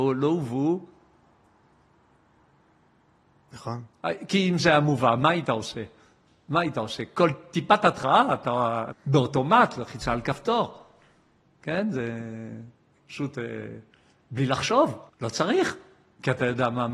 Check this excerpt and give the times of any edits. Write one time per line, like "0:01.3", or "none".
0:08.9
0:15.1